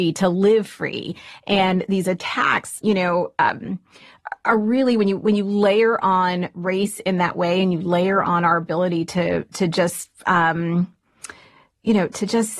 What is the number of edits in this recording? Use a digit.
1